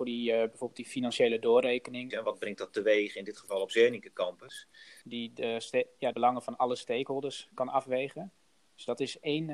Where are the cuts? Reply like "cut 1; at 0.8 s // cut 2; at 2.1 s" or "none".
cut 1; at 2.1 s // cut 2; at 5.0 s // cut 3; at 6.1 s